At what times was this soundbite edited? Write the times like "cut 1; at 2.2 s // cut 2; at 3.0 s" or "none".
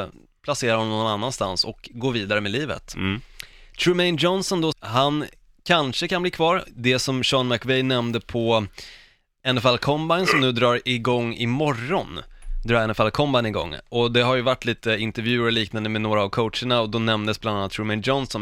cut 1; at 4.7 s